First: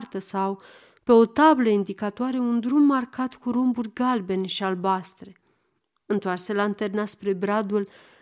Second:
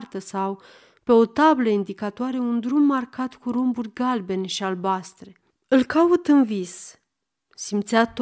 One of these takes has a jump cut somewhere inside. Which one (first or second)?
second